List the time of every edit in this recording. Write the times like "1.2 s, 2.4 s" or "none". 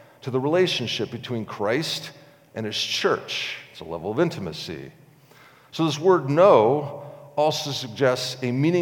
none